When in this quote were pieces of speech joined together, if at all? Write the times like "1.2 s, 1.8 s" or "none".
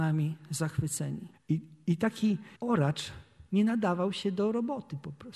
1.3 s, 2.5 s